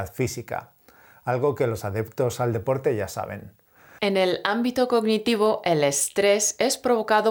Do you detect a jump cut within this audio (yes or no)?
yes